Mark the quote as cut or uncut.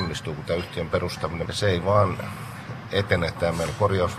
cut